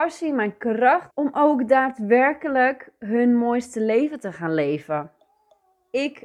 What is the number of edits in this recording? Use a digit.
1